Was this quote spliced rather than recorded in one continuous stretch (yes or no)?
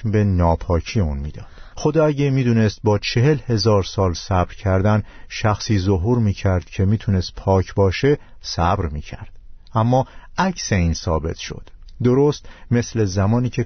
yes